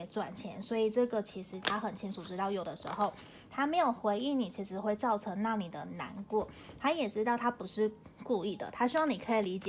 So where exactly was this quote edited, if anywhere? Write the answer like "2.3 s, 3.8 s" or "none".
none